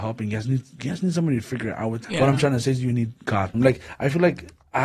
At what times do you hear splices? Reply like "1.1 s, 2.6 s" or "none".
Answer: 2.0 s, 3.5 s